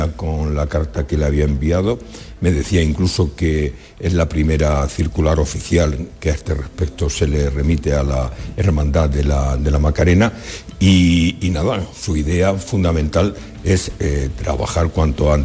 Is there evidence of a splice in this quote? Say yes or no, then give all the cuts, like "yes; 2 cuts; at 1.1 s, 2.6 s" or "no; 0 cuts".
no; 0 cuts